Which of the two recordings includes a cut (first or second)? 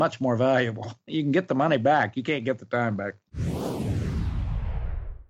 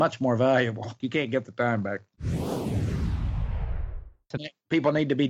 second